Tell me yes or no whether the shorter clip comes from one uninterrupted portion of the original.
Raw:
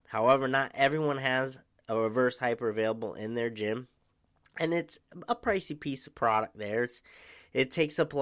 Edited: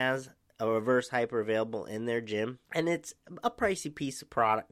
no